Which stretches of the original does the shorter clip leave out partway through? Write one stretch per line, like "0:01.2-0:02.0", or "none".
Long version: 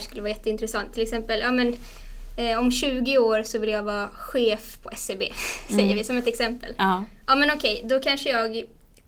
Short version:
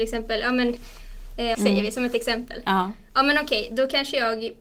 0:02.5-0:05.7